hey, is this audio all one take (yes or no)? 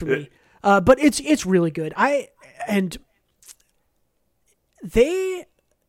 yes